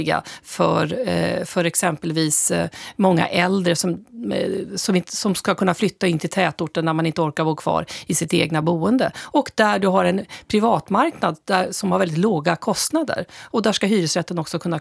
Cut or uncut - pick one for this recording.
uncut